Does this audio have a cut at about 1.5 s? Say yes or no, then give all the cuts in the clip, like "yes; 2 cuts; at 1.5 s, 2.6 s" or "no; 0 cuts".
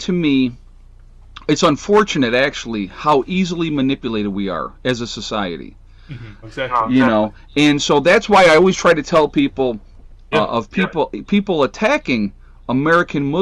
no; 2 cuts; at 6.4 s, 10.3 s